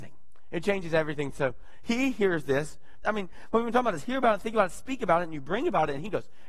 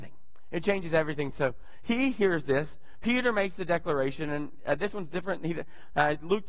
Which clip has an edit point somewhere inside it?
first; 1 cut; at 3.0 s

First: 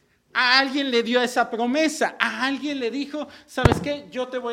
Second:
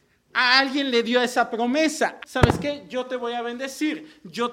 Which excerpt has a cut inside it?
second; 1 cut; at 2.2 s

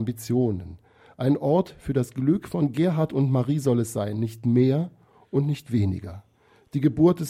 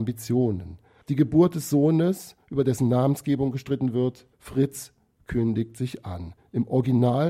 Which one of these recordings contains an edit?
second; 2 cuts; at 1.0 s, 4.3 s

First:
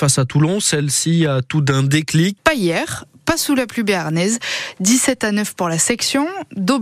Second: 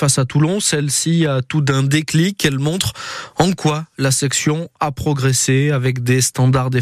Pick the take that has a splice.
first; 1 cut; at 2.4 s

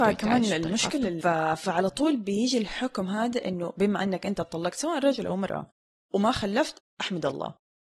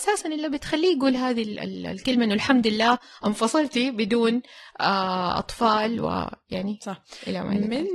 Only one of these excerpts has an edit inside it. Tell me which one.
first; 1 cut; at 1.2 s

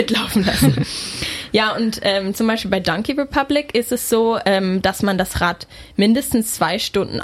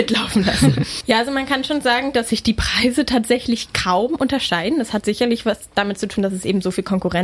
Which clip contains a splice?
second; 1 cut; at 1.0 s

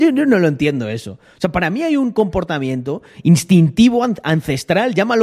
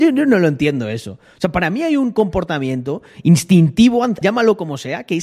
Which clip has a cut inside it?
second; 1 cut; at 4.2 s

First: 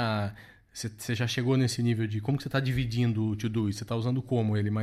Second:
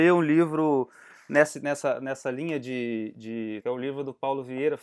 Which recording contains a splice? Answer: second; 1 cut; at 3.6 s

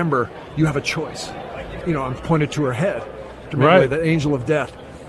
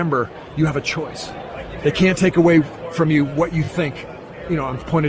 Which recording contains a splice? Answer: first; 2 cuts; at 1.8 s, 3.5 s

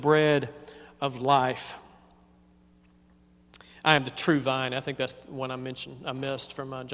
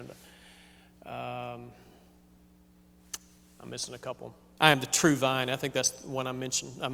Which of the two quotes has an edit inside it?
second; 1 cut; at 4.6 s

